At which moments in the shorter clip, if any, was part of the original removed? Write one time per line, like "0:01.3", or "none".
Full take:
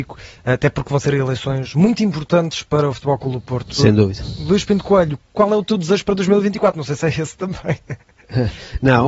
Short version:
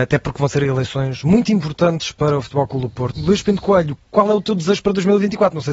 0:03.2